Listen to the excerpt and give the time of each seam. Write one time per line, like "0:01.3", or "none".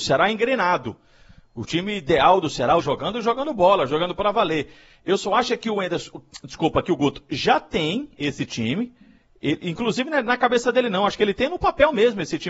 0:02.8